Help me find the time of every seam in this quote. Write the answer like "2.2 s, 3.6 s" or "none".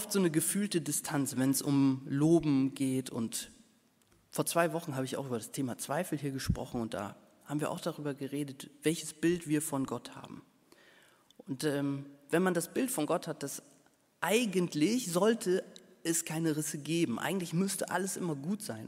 none